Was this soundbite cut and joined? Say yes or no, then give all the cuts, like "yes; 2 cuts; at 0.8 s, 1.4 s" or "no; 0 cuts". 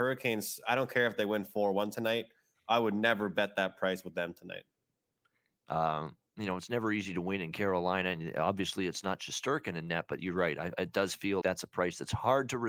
yes; 2 cuts; at 5.5 s, 11.4 s